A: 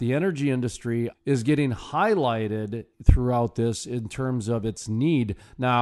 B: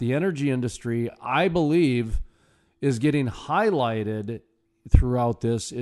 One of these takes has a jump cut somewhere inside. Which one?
A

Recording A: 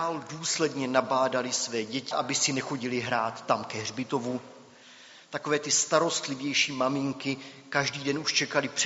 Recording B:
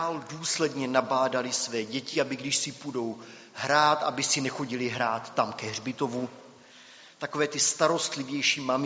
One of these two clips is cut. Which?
A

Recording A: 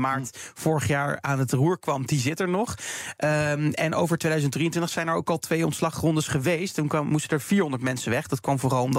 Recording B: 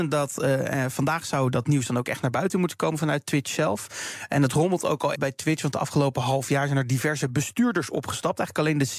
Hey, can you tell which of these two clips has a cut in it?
B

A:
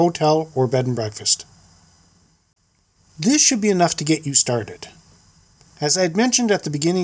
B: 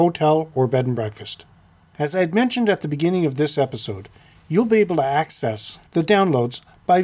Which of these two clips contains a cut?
B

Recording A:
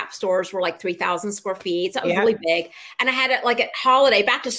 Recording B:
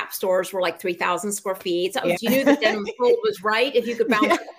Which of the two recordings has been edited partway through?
B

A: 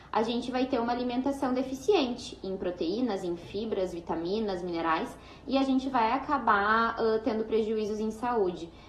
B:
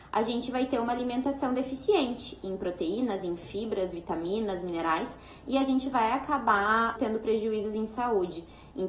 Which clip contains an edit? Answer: B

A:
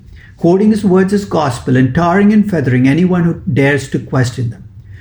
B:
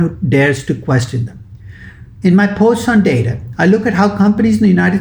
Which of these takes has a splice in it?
B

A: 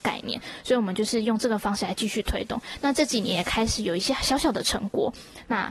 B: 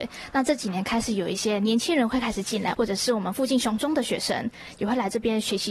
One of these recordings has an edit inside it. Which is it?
B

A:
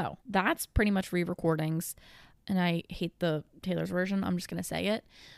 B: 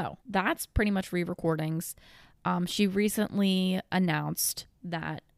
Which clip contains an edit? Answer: A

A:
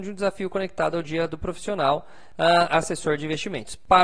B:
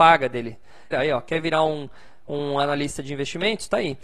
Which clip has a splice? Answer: B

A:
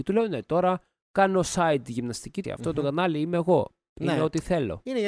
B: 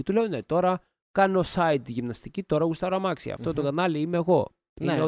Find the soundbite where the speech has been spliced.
A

